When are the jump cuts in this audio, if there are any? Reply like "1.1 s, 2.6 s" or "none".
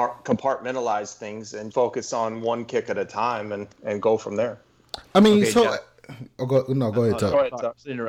1.7 s